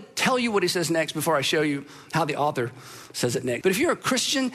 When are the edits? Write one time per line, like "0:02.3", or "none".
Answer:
0:03.6